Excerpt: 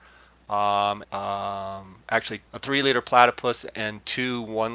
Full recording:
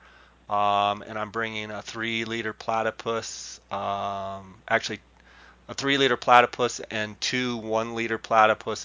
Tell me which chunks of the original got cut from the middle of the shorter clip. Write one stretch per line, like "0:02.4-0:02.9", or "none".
0:01.0-0:03.6
0:05.1-0:05.6